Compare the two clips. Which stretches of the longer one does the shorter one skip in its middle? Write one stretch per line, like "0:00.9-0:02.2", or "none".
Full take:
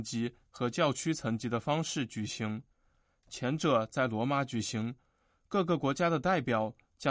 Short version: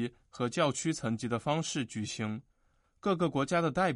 0:03.1-0:05.3